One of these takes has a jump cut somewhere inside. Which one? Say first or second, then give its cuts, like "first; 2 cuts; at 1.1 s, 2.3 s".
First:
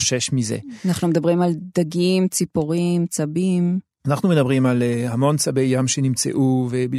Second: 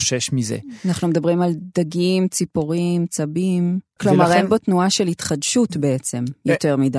second; 1 cut; at 4.0 s